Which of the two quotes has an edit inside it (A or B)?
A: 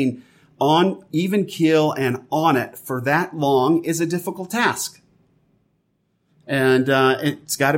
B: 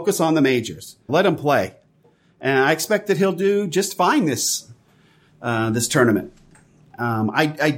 B